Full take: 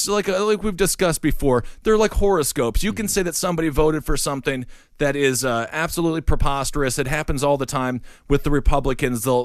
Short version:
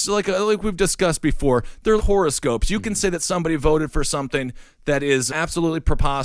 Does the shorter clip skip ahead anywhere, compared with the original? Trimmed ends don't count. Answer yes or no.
yes